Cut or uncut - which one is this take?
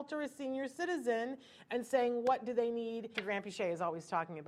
cut